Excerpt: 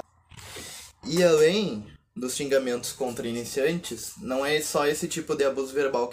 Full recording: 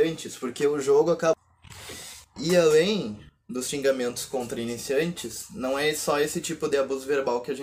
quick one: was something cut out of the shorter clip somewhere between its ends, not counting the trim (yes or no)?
no